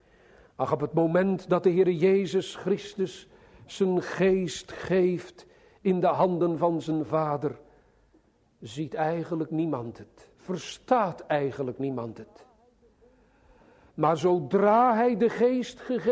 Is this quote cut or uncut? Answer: cut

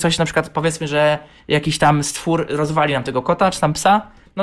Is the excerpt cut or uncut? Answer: uncut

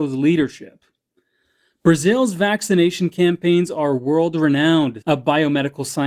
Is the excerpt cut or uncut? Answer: cut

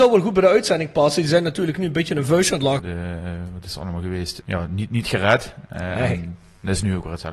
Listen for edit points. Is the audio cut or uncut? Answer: cut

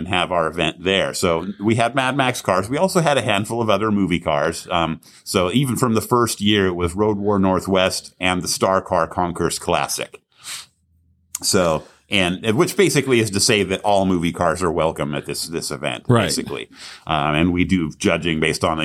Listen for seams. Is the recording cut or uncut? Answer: uncut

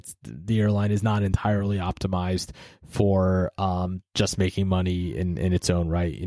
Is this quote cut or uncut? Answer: uncut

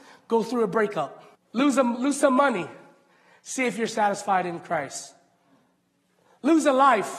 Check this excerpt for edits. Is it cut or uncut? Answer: cut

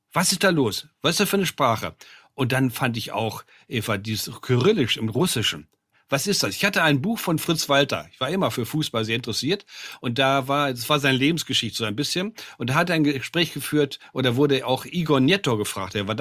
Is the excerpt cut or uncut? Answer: uncut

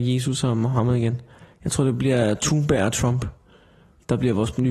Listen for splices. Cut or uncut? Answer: uncut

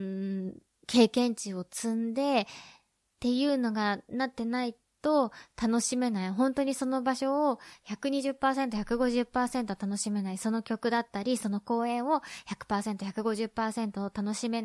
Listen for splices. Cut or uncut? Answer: uncut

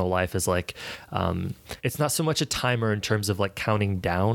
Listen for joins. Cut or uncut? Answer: cut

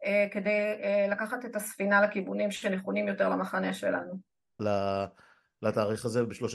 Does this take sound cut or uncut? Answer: cut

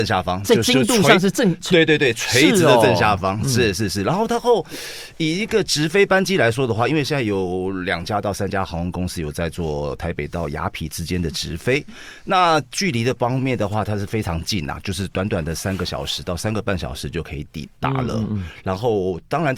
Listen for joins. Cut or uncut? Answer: uncut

